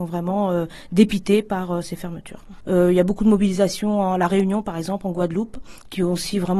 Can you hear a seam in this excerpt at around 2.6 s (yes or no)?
yes